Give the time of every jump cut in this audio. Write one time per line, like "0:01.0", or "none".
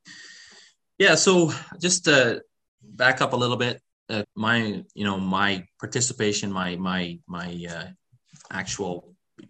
0:04.2
0:07.2